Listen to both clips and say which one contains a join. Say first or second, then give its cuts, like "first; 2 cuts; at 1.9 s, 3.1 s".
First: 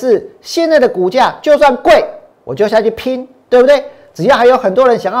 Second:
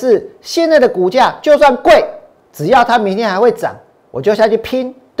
first; 1 cut; at 2.3 s